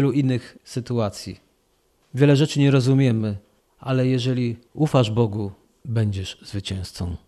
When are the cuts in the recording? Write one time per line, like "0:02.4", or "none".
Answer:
none